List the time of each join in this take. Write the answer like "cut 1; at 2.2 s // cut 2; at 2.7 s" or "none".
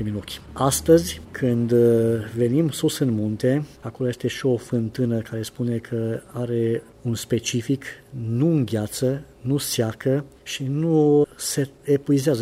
cut 1; at 3.8 s